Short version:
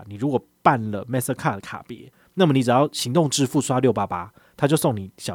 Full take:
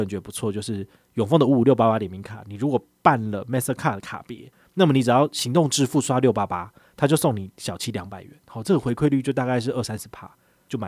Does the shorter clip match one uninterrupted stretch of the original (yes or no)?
yes